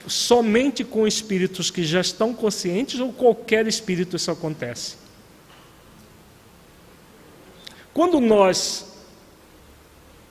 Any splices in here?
yes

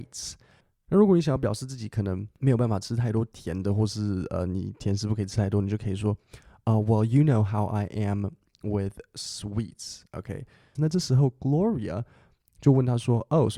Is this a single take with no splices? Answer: no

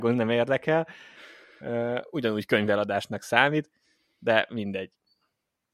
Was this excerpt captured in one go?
yes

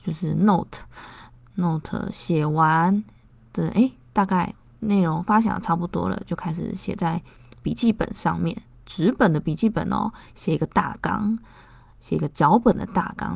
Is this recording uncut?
yes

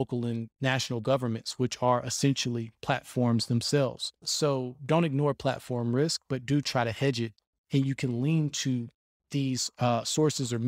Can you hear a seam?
no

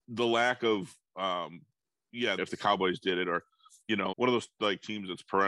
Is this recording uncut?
no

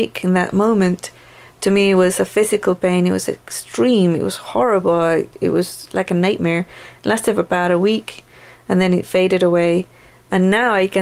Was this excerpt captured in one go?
yes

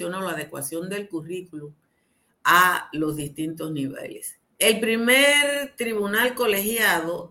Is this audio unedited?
no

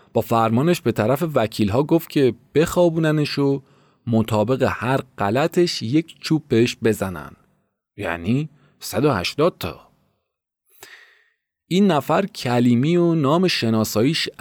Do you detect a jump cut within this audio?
no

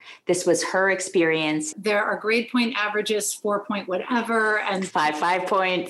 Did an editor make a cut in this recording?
yes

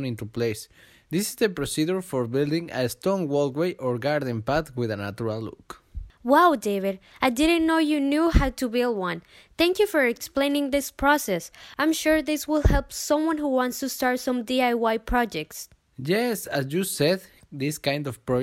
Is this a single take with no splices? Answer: yes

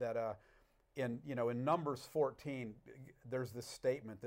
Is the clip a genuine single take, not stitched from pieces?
yes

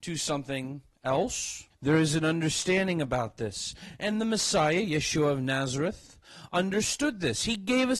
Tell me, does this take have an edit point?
yes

